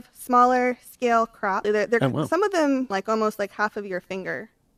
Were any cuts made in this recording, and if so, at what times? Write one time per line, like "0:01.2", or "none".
0:01.6
0:02.9